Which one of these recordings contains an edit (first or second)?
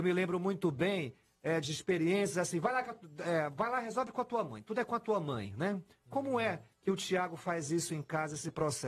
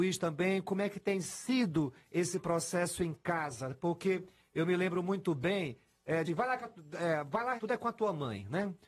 second